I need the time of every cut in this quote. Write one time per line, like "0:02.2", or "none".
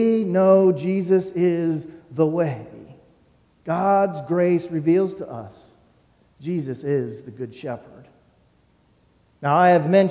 none